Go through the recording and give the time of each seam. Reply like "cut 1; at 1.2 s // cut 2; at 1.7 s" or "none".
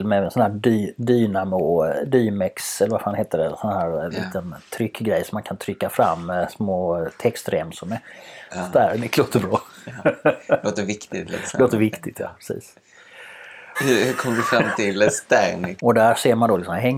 cut 1; at 8.5 s // cut 2; at 13.7 s // cut 3; at 15.8 s